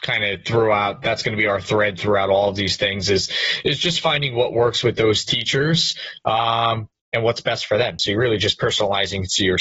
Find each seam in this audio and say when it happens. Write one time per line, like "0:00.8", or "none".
none